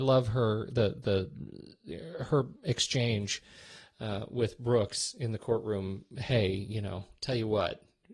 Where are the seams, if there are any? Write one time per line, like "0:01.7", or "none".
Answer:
none